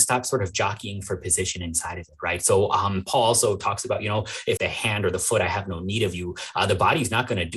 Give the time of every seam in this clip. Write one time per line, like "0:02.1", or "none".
0:04.6